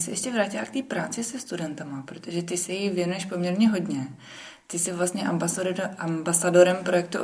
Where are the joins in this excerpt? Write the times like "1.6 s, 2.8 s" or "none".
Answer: none